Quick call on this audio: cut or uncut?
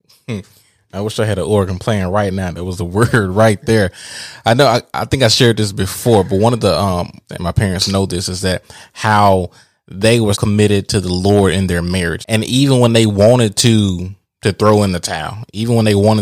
cut